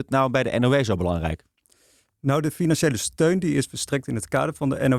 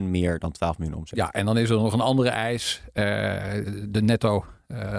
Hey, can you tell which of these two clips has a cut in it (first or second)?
second